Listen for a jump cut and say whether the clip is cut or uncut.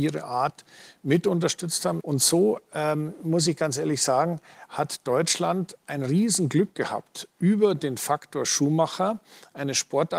cut